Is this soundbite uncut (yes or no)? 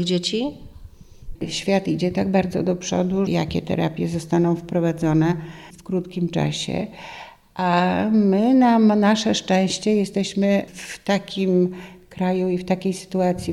no